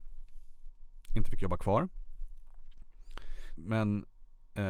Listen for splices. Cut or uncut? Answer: cut